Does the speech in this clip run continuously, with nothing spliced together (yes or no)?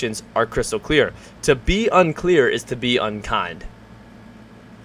yes